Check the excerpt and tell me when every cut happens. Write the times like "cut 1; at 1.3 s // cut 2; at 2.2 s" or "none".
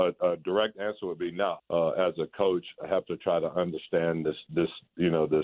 cut 1; at 1.6 s